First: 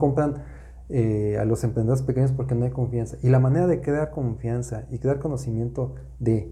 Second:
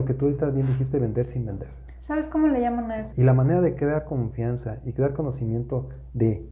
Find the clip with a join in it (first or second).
second